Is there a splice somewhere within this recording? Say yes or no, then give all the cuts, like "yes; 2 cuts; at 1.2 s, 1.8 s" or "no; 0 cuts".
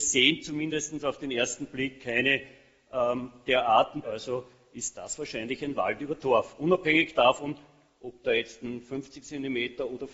yes; 1 cut; at 4.0 s